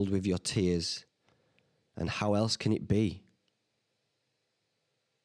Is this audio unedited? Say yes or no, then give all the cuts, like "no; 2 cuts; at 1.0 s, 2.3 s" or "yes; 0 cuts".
yes; 0 cuts